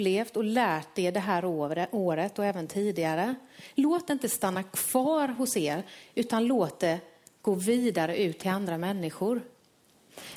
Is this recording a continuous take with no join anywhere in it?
yes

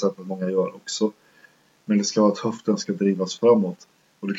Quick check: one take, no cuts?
yes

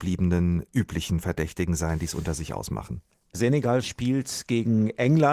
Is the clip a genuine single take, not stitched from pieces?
no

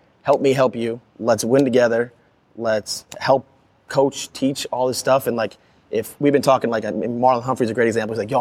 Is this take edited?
yes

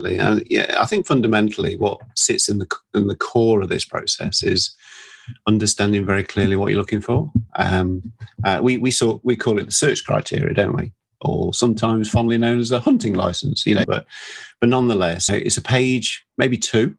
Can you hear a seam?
yes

